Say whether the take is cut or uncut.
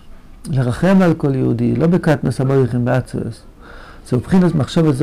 cut